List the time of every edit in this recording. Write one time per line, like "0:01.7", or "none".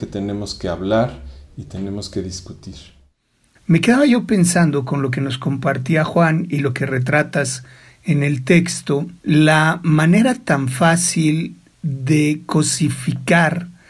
0:03.6
0:09.2